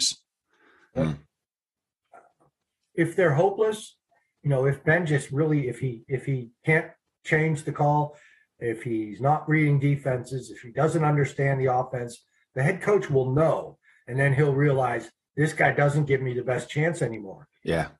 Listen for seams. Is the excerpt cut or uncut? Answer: cut